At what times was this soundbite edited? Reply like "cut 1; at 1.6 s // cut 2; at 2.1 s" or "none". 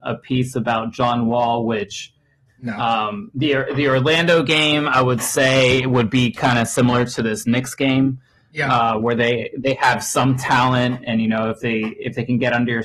cut 1; at 2.5 s